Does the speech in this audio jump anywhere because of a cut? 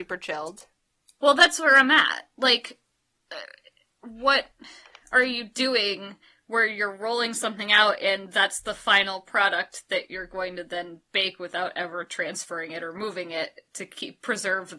yes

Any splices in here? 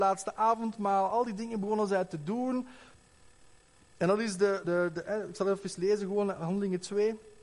yes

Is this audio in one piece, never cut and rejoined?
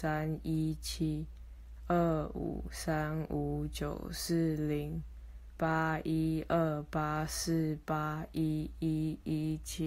yes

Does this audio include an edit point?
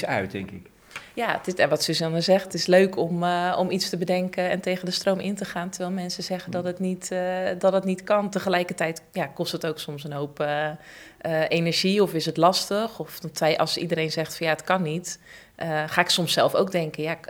no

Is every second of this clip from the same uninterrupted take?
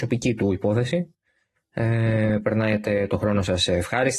no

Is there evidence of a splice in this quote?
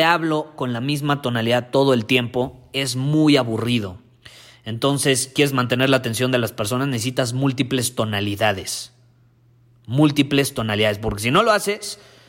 no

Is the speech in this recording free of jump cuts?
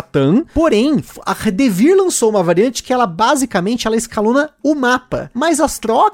yes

